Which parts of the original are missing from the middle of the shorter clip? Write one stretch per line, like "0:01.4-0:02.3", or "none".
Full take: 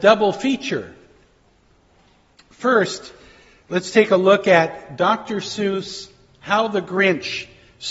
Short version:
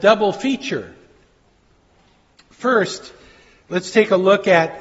none